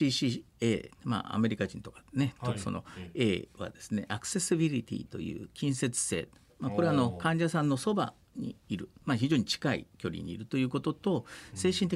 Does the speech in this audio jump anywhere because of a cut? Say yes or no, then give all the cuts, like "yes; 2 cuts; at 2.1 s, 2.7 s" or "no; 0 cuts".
yes; 1 cut; at 2.5 s